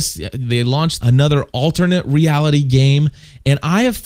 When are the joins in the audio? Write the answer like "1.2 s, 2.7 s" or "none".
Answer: none

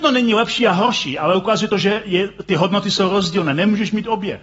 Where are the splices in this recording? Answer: none

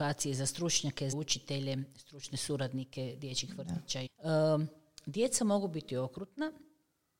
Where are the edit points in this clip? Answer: 1.1 s, 4.1 s

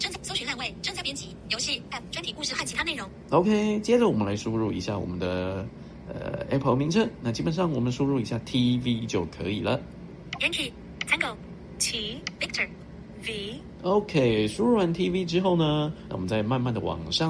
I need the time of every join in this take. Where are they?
16.1 s

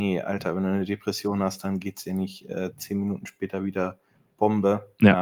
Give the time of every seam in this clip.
none

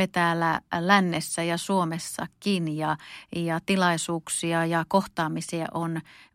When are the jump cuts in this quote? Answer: none

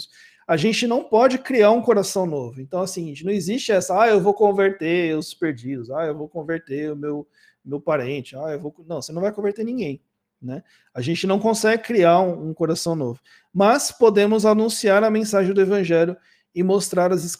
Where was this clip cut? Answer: none

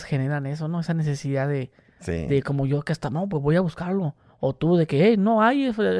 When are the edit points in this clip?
none

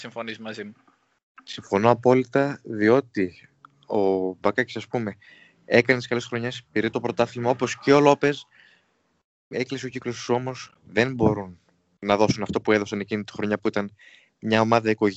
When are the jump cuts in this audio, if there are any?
none

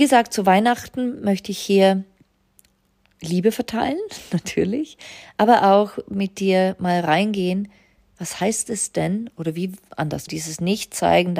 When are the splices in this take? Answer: 10.3 s

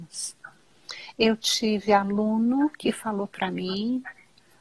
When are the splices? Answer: none

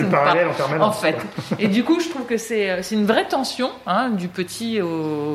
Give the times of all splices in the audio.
none

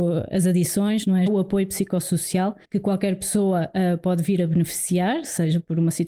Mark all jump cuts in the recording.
1.3 s, 2.6 s

